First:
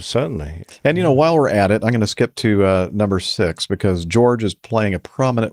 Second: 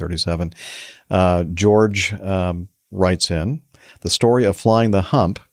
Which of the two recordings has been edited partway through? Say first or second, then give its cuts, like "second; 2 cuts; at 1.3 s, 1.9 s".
second; 1 cut; at 3.9 s